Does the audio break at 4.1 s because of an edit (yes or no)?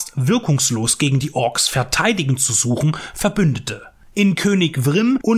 no